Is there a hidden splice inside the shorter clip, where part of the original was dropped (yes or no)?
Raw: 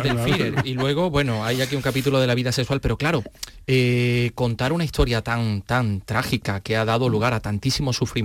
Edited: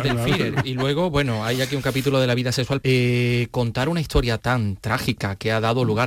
yes